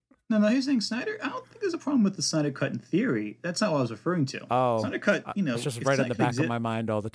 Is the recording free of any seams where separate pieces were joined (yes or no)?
yes